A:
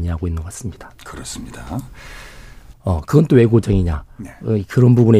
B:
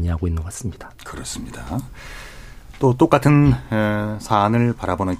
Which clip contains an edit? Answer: A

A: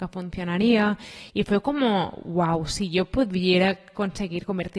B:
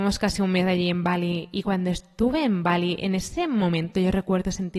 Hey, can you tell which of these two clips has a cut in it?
A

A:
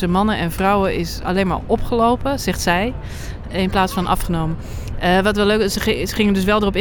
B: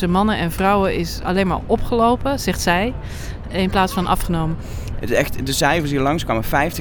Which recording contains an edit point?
B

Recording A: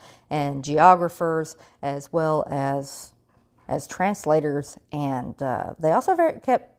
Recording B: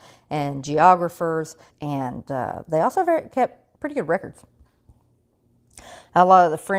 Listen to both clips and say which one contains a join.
B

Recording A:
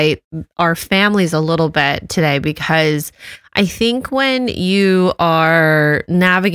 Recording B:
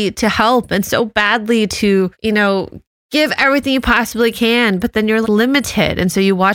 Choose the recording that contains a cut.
B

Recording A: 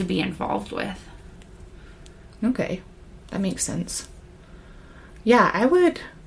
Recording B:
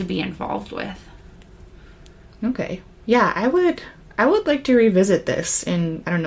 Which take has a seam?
B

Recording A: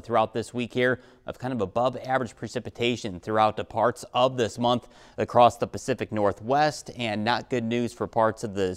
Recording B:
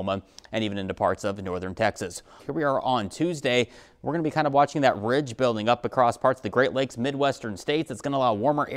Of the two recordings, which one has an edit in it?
B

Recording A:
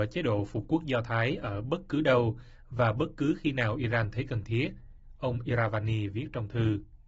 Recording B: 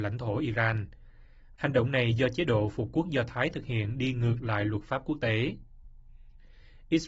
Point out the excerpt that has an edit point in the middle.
B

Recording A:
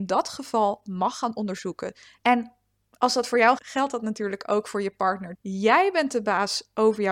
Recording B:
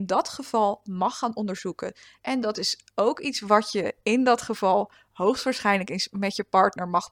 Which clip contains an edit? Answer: A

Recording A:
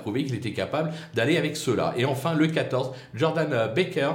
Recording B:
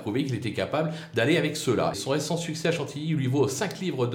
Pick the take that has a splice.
B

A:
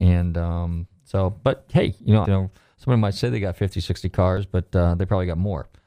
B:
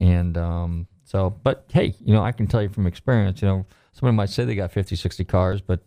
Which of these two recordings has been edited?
A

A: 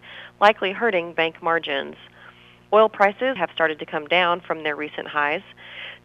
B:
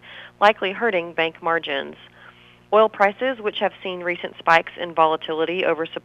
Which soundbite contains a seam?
A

